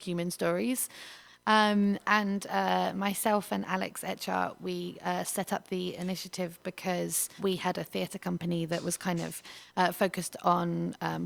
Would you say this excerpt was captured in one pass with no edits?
no; 2 cuts; at 1.3 s, 7.4 s

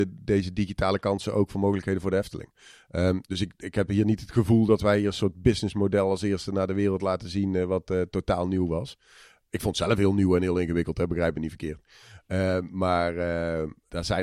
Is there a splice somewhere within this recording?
no; 0 cuts

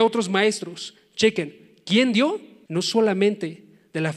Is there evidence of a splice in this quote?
yes; 1 cut; at 2.7 s

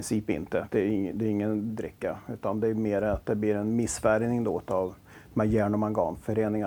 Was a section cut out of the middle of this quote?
yes; 1 cut; at 1.7 s

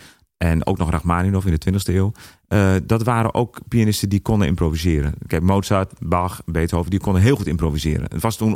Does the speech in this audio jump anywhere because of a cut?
no; 0 cuts

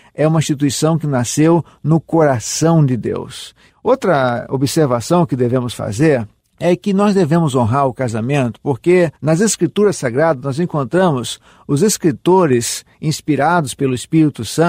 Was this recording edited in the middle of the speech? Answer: yes; 2 cuts; at 3.7 s, 9.2 s

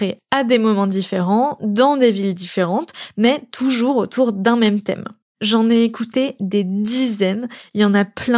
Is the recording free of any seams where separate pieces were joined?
yes; 0 cuts

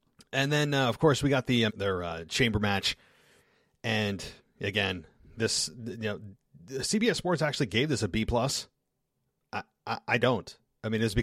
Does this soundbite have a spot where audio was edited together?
yes; 1 cut; at 1.7 s

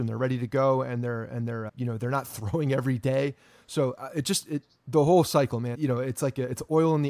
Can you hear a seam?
yes; 2 cuts; at 1.7 s, 5.7 s

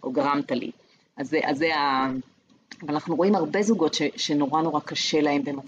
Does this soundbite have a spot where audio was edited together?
no; 0 cuts

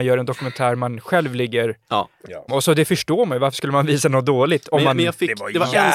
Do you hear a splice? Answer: yes; 1 cut; at 2.5 s

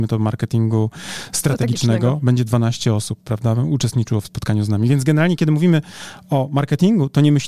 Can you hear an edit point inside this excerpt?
no; 0 cuts

